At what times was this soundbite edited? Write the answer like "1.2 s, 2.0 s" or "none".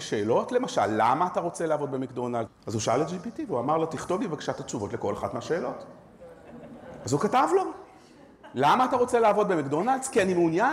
2.5 s